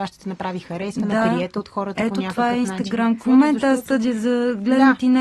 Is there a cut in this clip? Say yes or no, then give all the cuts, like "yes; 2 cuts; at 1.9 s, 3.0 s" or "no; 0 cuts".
yes; 1 cut; at 3.2 s